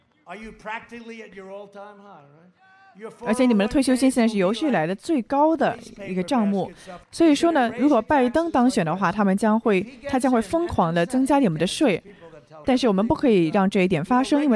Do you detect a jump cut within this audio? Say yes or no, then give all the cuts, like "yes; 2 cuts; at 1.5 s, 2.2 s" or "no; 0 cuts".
yes; 2 cuts; at 7.0 s, 12.6 s